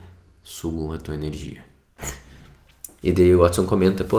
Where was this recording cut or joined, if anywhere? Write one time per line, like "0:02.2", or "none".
0:03.0